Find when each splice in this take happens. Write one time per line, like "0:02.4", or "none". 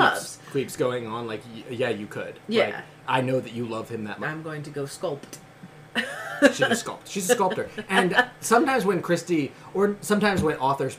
0:04.2